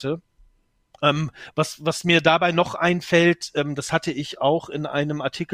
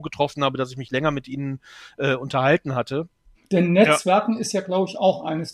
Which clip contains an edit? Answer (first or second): second